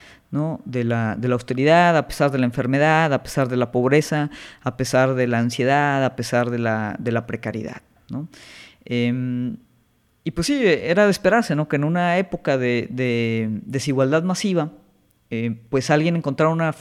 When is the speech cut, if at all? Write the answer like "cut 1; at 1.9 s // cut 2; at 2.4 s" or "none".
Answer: none